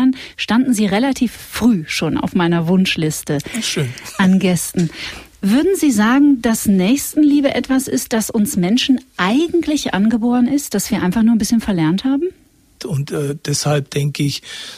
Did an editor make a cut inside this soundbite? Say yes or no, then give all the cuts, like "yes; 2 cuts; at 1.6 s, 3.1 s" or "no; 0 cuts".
yes; 1 cut; at 12.8 s